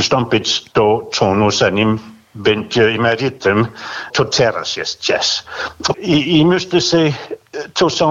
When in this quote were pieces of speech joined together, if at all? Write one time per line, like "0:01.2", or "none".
0:04.1
0:05.9

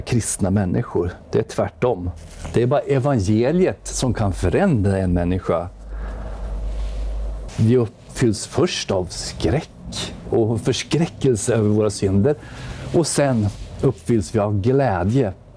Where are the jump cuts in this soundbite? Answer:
0:07.5

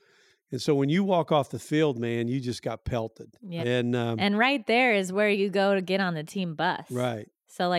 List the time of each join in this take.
0:03.6

